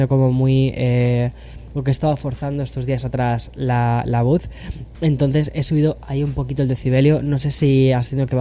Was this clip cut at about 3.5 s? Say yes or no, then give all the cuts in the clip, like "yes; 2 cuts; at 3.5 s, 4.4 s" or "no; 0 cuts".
no; 1 cut; at 4.9 s